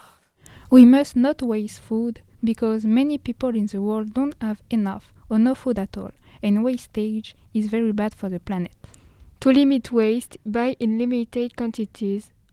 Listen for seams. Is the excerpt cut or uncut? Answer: uncut